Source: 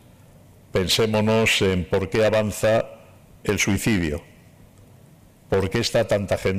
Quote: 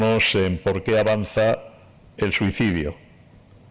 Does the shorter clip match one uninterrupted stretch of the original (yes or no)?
yes